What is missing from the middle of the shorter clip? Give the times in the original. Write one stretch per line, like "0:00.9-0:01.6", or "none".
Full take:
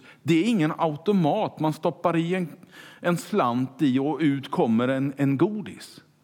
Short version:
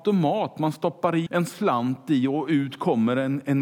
0:02.3-0:03.0